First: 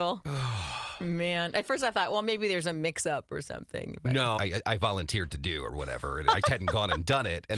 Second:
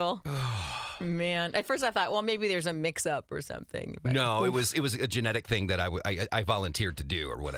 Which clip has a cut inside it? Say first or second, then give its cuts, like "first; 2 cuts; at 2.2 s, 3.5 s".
first; 2 cuts; at 4.4 s, 6.4 s